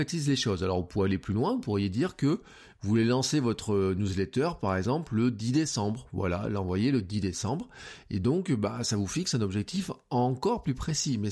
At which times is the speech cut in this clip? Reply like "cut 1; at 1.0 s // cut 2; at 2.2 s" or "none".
none